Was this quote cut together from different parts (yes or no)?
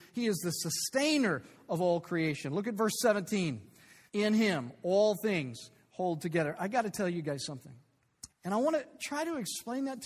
yes